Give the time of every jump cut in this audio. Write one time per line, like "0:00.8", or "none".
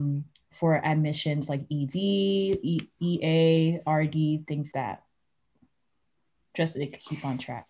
0:04.7